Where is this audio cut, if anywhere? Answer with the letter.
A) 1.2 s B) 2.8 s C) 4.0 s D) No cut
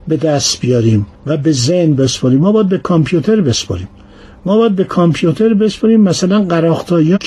A